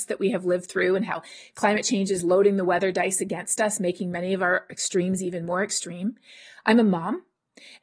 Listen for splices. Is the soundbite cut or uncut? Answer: uncut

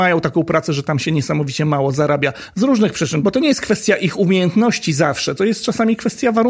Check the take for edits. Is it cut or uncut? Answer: uncut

